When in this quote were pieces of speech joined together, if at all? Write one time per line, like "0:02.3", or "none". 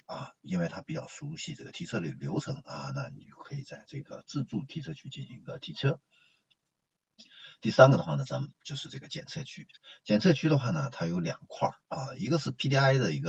none